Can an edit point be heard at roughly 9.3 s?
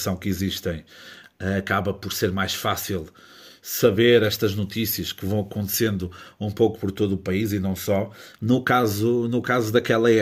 no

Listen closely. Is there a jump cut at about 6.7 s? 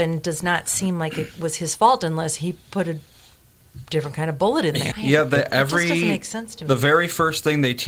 no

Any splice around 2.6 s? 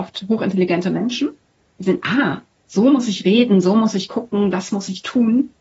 no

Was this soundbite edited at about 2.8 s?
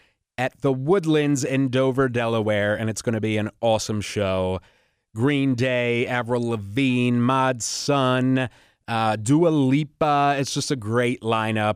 no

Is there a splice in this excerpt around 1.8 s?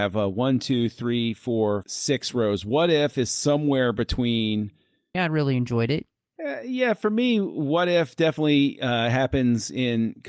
yes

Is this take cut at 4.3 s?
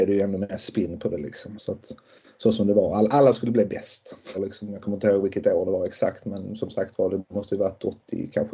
yes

